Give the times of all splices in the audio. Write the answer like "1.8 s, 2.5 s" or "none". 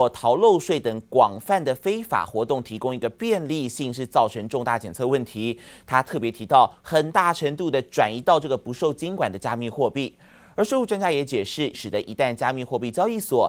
6.8 s, 11.7 s

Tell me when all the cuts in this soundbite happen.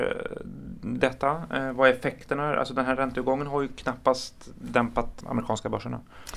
5.2 s

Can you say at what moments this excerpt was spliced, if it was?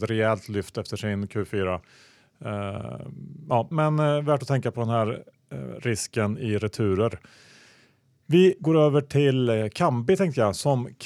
3.7 s

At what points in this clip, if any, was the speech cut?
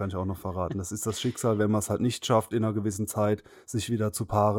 none

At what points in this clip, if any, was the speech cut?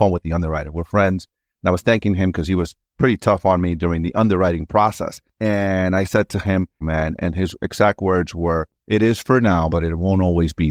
6.8 s, 9.7 s

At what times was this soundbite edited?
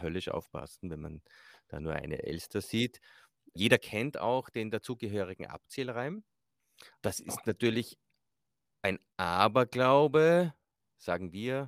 6.9 s

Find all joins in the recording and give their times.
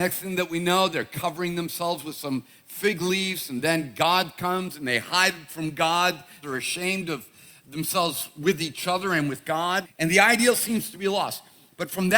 6.4 s, 9.8 s

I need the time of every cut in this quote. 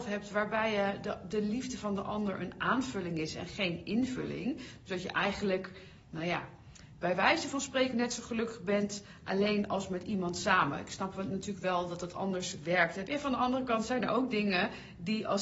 13.1 s

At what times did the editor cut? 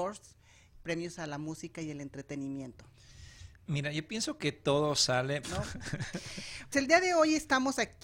5.4 s, 6.7 s

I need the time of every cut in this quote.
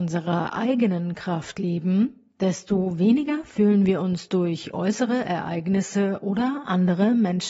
none

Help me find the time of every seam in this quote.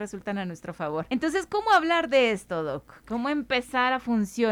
none

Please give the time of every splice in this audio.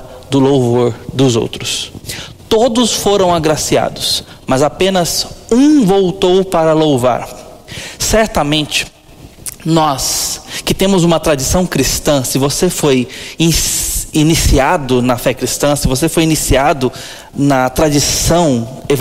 none

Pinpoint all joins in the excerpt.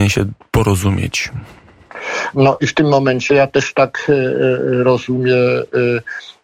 2.3 s

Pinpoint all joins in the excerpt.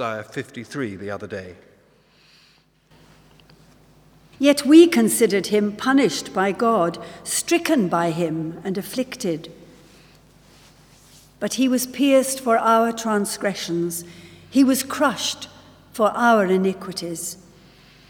4.3 s

